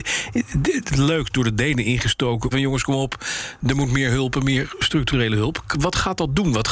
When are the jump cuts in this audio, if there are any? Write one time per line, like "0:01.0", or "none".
0:02.5